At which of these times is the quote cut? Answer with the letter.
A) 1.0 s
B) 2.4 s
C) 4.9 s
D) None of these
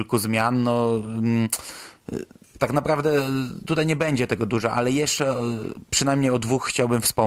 D